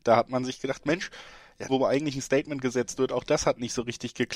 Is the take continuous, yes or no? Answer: no